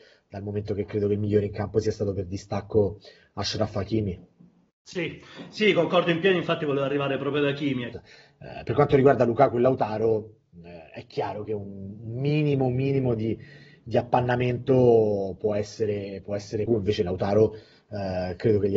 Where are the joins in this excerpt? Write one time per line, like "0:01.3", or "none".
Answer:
0:07.9
0:16.7

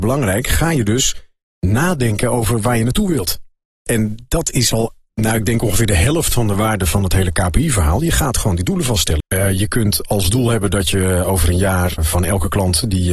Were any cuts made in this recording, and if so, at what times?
0:09.2
0:12.0

